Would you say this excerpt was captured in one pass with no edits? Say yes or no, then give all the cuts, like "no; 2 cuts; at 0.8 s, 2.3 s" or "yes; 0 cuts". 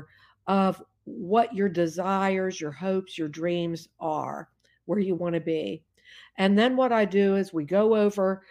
yes; 0 cuts